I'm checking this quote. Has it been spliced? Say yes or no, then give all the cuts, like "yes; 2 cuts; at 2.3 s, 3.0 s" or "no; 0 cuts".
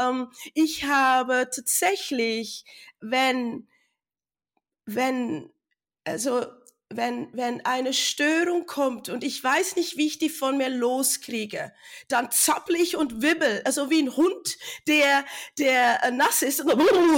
no; 0 cuts